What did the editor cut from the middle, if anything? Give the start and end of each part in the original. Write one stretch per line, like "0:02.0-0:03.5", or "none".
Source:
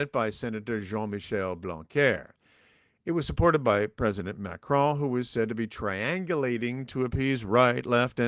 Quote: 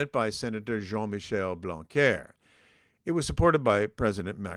none